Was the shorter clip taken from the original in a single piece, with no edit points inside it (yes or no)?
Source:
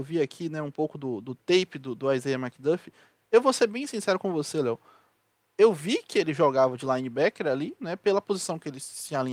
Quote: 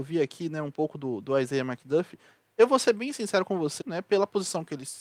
no